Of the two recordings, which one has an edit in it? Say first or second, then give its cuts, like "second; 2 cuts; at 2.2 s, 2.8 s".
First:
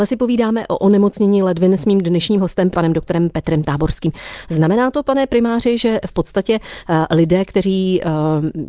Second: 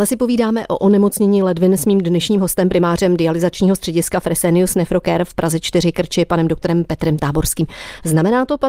first; 1 cut; at 2.7 s